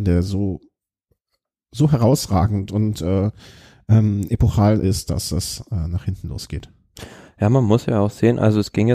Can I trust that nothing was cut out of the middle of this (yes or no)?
yes